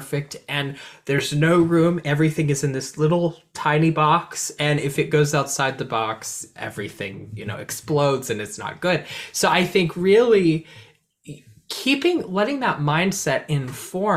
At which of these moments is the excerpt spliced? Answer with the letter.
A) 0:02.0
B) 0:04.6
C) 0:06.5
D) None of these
D